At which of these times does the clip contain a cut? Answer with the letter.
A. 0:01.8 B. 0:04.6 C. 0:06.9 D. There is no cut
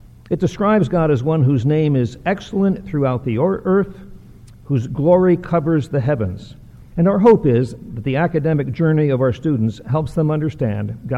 C